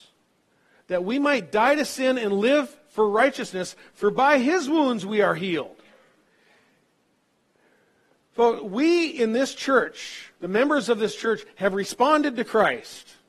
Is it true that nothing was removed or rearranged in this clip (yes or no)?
yes